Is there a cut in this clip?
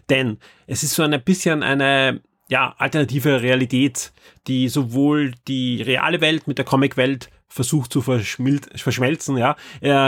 no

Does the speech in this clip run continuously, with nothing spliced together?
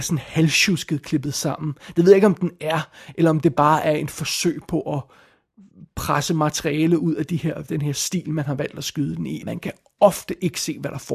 no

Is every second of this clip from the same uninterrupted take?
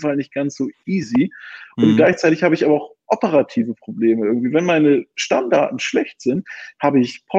yes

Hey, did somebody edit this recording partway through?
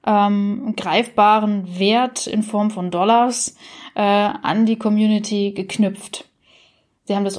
no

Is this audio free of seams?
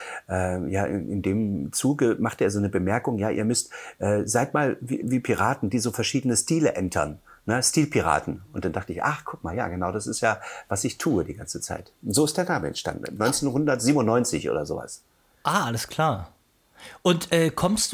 no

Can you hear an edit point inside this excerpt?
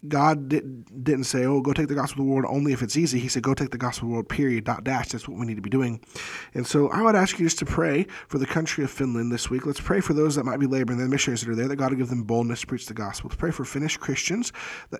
no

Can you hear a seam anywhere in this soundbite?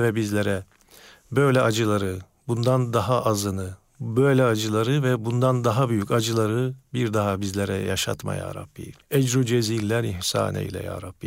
yes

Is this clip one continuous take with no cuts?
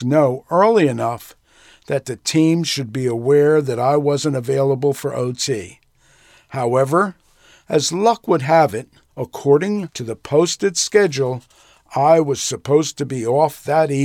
yes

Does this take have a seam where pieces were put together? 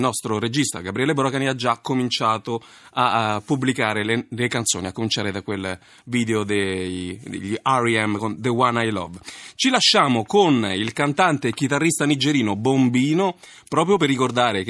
no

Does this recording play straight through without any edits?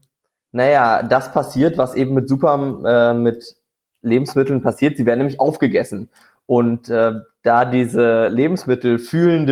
yes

